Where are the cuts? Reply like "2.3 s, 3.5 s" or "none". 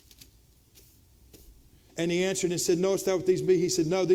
1.9 s